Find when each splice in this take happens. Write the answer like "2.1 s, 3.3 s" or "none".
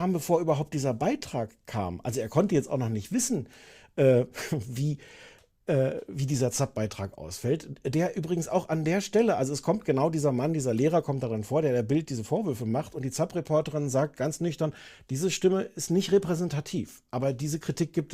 none